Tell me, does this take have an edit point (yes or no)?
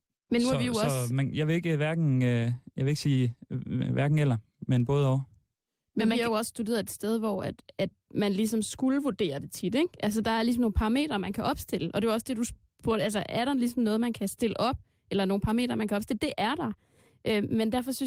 no